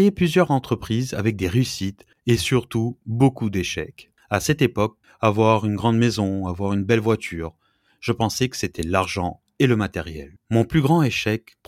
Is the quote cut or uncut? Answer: cut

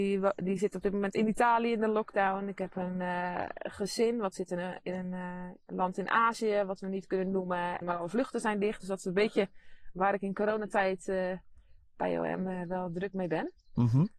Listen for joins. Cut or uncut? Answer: cut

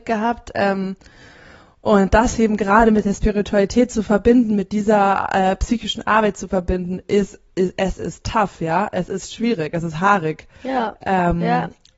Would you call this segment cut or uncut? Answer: uncut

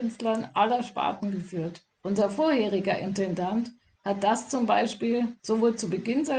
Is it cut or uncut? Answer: cut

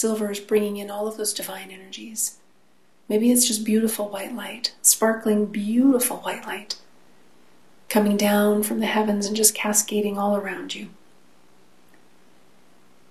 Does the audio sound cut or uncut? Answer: uncut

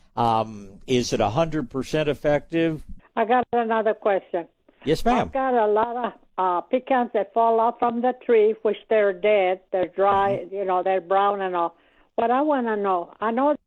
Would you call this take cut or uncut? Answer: cut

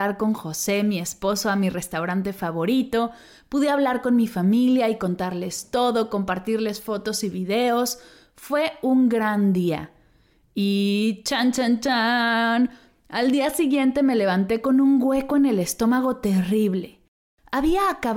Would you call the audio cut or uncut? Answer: uncut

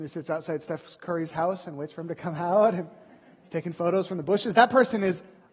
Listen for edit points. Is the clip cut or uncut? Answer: uncut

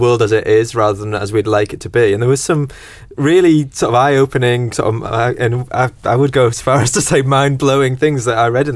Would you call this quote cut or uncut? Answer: uncut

